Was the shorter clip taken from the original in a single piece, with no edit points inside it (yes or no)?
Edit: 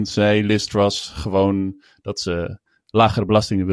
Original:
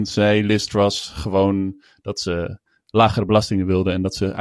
yes